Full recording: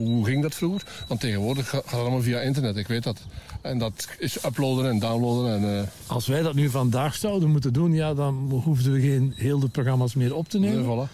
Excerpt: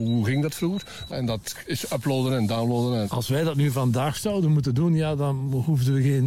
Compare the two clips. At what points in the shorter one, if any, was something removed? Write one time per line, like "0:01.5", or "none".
0:01.1
0:03.0